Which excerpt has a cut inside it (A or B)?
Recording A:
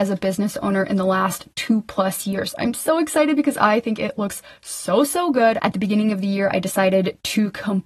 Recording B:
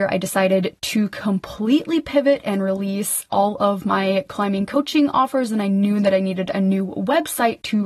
A